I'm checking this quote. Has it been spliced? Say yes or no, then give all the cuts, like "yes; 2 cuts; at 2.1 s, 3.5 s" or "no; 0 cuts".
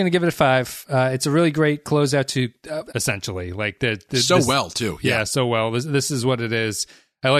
yes; 1 cut; at 2.9 s